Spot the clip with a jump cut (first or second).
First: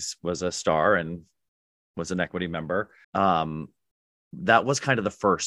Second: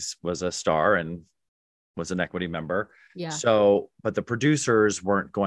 first